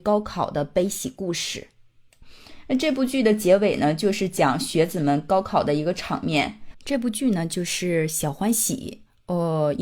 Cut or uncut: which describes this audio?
cut